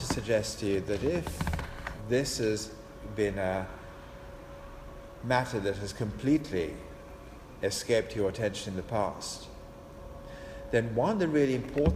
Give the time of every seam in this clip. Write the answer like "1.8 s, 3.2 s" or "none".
none

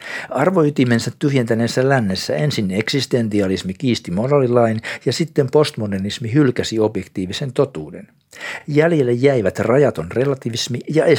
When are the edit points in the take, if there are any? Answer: none

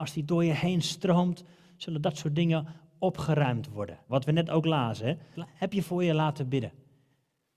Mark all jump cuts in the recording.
4.1 s, 5.3 s

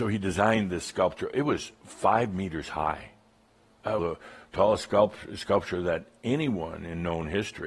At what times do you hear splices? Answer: 4.0 s

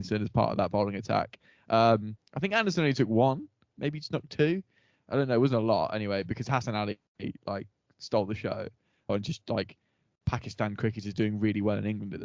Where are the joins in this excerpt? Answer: 3.7 s, 9.1 s

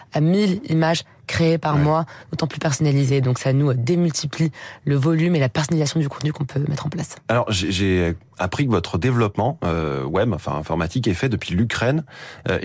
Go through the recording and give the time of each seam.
none

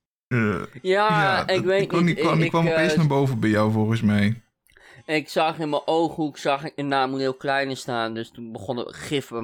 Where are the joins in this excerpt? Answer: none

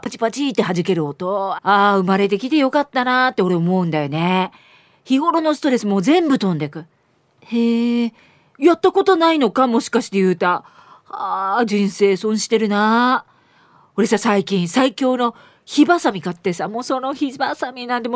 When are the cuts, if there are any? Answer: 1.5 s

